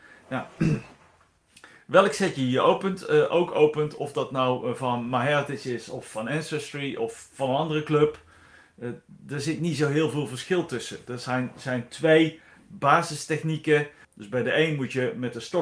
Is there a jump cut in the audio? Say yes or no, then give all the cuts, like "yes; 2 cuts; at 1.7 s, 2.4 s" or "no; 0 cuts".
yes; 1 cut; at 14.0 s